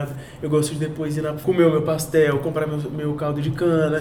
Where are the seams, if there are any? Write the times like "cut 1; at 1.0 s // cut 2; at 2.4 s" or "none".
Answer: cut 1; at 1.4 s